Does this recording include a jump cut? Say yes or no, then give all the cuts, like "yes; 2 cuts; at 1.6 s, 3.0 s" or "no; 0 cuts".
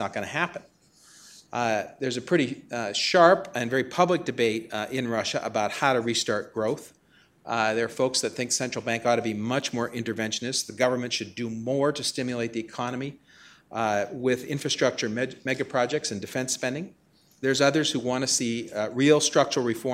no; 0 cuts